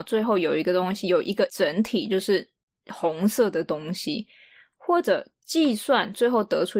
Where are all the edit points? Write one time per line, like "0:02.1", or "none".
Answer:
none